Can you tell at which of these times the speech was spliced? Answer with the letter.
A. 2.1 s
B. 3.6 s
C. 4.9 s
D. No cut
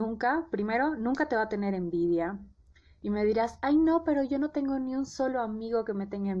D